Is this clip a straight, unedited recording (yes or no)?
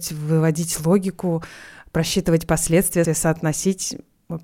no